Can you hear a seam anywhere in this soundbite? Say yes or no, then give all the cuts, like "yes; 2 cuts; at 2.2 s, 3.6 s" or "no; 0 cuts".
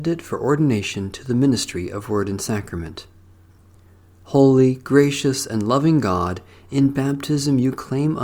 no; 0 cuts